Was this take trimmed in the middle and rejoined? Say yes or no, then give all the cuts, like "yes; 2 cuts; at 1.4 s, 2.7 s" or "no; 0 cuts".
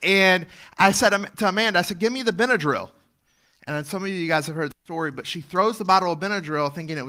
no; 0 cuts